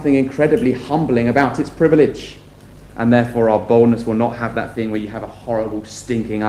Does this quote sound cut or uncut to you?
cut